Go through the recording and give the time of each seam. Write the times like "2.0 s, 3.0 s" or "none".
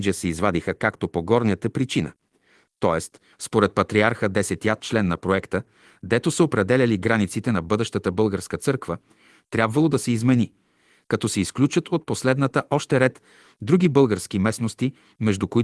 3.3 s